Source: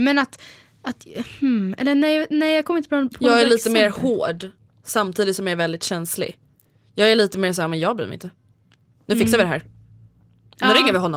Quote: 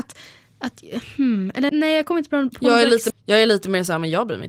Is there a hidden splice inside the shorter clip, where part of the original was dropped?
yes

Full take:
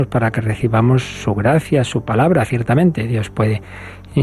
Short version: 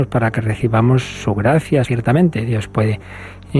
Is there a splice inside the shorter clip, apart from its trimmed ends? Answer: yes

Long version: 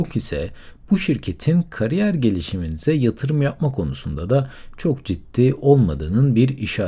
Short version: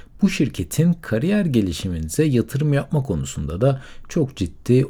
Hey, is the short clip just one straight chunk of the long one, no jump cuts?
yes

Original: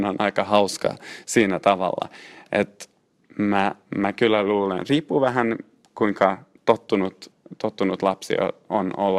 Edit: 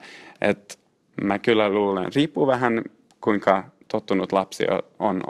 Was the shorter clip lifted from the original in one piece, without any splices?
no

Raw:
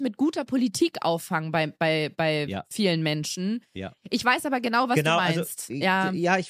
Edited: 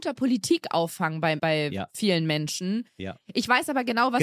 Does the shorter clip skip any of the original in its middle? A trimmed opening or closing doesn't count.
yes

